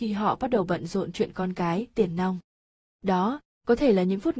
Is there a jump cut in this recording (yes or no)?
no